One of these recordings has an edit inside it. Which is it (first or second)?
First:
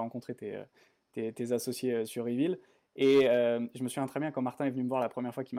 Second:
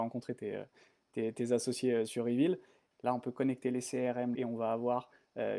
second